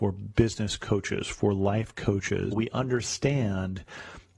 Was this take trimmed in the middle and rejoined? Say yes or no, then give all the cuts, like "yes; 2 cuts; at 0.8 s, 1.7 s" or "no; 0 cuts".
yes; 1 cut; at 2.5 s